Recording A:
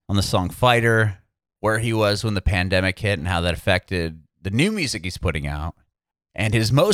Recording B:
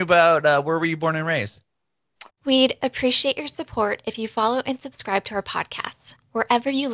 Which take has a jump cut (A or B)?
B